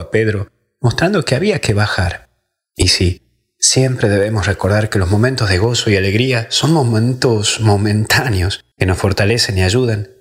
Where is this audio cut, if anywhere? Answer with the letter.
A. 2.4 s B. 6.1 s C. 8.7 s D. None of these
C